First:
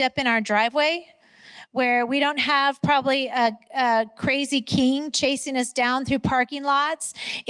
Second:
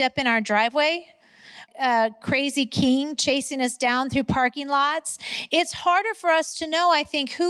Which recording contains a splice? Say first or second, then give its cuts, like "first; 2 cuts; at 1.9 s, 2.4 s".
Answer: second; 1 cut; at 1.7 s